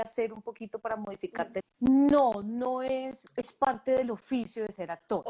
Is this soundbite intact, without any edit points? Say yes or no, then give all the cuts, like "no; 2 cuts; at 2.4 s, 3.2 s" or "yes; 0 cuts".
no; 2 cuts; at 1.6 s, 3.3 s